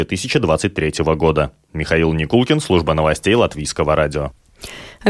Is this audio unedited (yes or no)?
yes